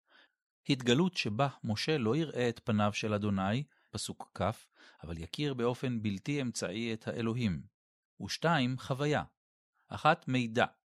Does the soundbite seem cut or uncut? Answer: cut